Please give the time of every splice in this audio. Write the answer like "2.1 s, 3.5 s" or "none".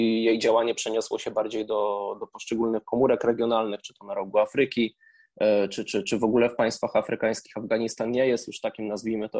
none